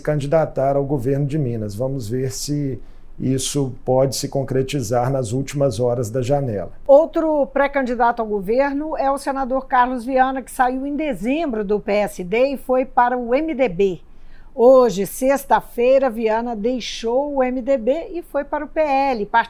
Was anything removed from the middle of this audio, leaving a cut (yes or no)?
no